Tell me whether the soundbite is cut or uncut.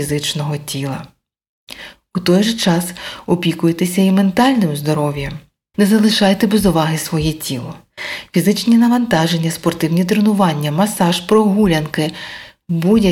cut